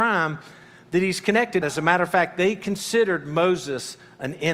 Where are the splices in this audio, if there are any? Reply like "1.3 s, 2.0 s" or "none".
1.6 s